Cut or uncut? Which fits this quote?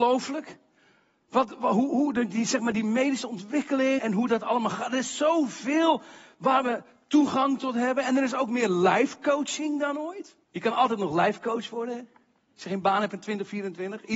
cut